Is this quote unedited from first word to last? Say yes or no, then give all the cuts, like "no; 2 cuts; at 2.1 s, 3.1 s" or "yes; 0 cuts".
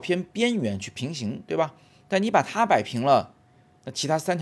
yes; 0 cuts